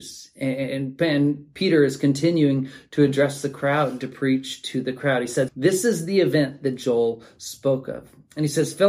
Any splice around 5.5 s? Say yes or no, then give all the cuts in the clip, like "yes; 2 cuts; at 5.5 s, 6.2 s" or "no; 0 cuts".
yes; 1 cut; at 5.5 s